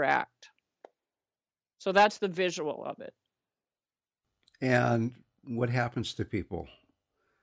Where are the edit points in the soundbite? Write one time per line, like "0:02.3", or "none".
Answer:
none